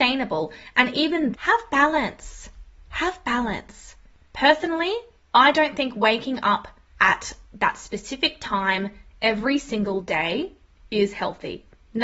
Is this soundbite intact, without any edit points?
no; 1 cut; at 1.3 s

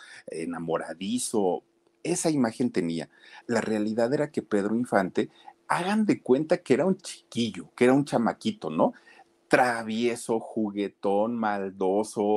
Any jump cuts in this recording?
yes; 1 cut; at 3.4 s

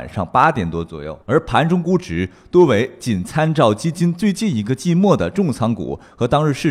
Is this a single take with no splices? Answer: no; 1 cut; at 1.2 s

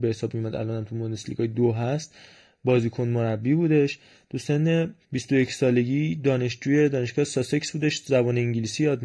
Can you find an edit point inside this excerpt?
yes; 1 cut; at 5.0 s

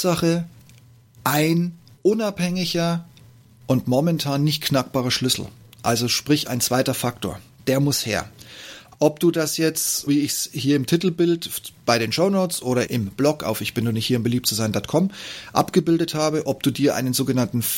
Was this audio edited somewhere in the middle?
yes; 3 cuts; at 8.9 s, 10.1 s, 12.9 s

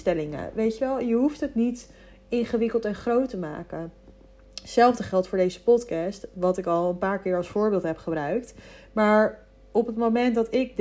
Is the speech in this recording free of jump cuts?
yes; 0 cuts

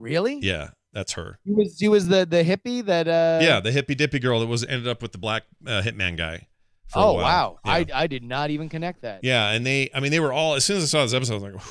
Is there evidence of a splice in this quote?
no; 0 cuts

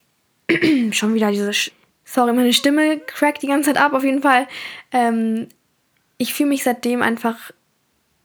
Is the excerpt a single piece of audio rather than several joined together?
yes; 0 cuts

